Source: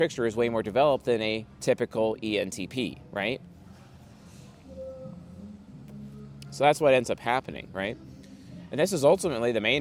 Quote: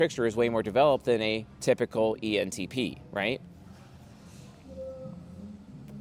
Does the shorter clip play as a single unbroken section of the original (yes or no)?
yes